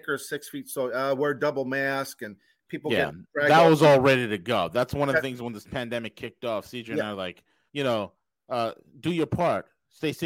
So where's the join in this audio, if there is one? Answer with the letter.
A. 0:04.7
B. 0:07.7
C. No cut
B